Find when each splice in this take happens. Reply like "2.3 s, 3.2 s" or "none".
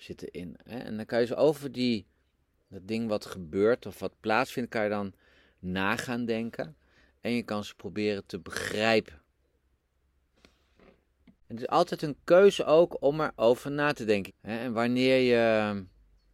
14.3 s